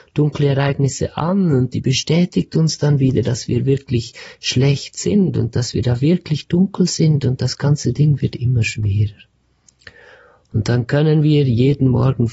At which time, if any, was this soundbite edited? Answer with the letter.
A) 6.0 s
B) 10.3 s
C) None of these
C